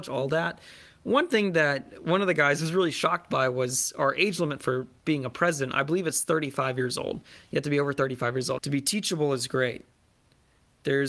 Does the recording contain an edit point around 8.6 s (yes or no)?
yes